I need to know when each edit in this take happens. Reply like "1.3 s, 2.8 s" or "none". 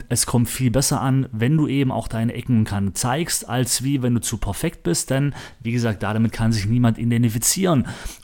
none